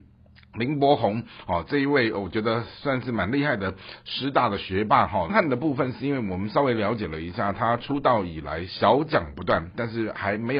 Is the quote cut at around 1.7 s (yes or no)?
no